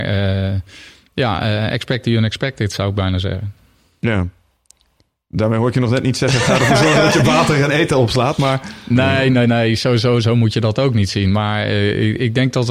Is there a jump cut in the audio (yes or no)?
no